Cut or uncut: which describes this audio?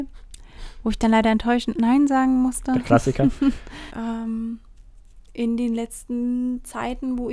cut